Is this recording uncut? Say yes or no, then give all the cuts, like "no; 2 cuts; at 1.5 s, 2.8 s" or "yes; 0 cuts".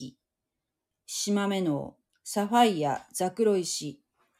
no; 1 cut; at 0.9 s